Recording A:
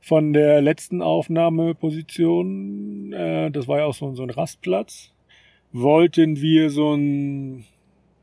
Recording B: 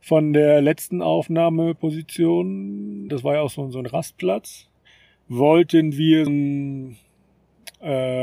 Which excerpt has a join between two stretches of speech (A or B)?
B